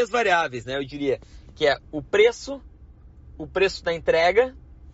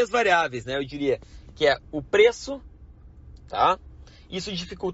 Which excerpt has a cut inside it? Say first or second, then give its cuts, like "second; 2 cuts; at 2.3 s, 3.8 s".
second; 1 cut; at 3.4 s